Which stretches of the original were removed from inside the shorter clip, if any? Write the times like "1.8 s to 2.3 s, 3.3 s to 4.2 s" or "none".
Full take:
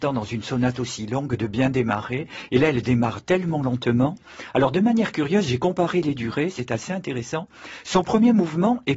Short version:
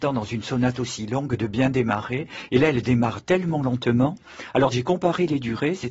4.7 s to 5.4 s